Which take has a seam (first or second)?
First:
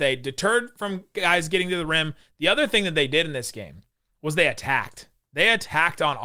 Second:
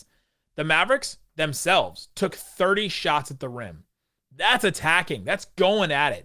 first